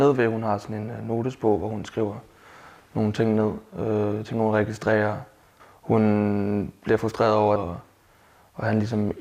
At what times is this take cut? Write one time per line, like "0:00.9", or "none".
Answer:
0:05.6
0:07.6